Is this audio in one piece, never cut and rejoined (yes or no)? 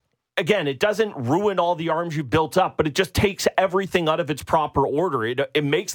yes